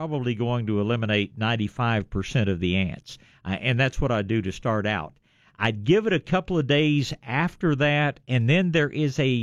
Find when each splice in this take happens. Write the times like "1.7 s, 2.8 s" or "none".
none

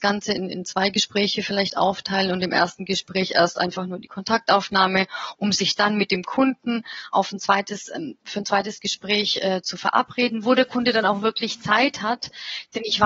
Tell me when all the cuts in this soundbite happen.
none

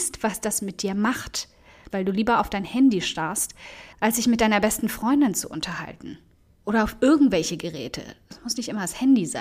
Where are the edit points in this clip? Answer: 1.9 s, 3.9 s

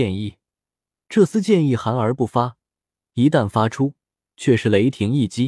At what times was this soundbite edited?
none

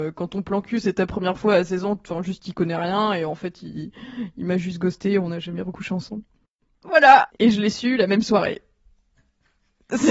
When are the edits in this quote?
7.3 s

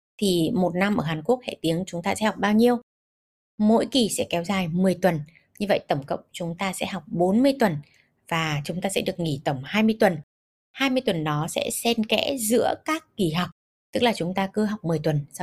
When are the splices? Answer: 3.4 s

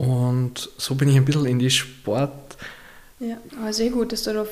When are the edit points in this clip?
3.5 s

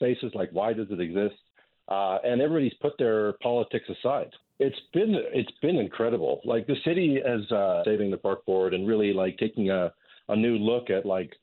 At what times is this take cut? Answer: 4.4 s, 7.8 s

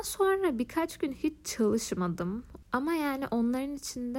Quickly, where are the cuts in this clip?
2.6 s

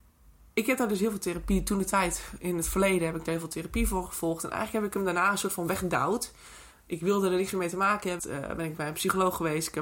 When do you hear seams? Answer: 8.2 s

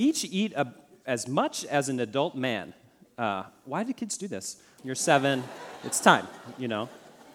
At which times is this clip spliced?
4.8 s

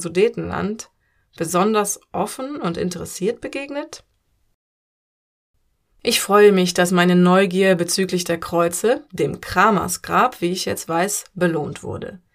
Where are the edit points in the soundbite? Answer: none

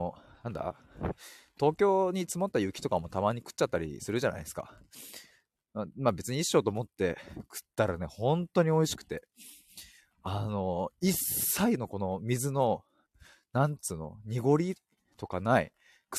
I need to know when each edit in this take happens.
5.6 s

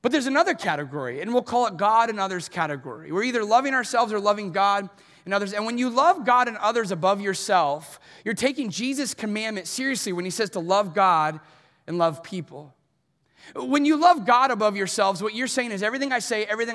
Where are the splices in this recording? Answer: none

